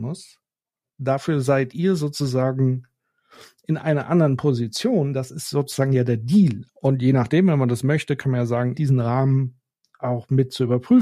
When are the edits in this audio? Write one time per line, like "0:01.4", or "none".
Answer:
0:06.7
0:08.7